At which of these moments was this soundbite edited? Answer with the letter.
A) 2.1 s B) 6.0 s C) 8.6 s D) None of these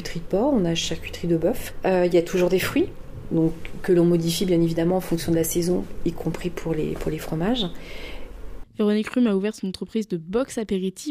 C